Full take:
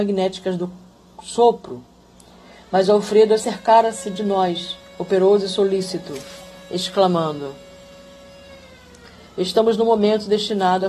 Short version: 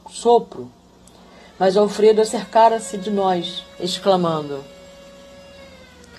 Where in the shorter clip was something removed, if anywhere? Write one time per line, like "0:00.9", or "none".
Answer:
0:03.8